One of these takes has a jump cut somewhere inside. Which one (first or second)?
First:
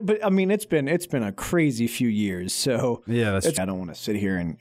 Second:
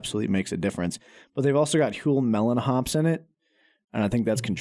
first